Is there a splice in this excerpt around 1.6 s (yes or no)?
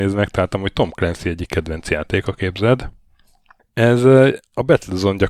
no